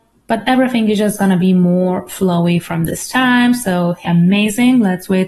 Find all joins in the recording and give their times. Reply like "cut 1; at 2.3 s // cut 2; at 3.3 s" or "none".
cut 1; at 4.0 s